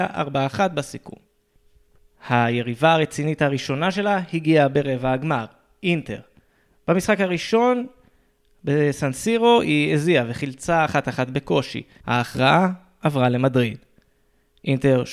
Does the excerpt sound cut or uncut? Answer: cut